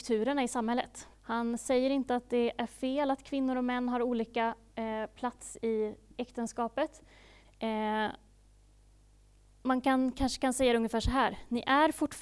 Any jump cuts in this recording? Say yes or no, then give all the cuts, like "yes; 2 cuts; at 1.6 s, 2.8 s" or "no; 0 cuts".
yes; 2 cuts; at 1.1 s, 7.4 s